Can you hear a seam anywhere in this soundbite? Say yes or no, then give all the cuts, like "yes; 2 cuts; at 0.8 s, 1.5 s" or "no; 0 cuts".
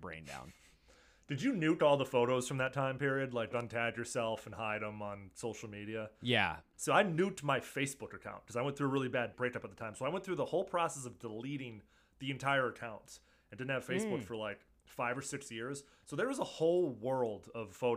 yes; 1 cut; at 3.5 s